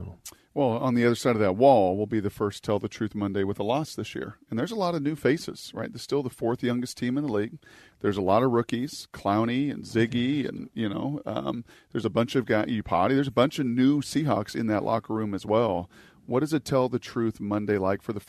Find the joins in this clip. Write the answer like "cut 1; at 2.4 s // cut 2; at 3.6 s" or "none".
none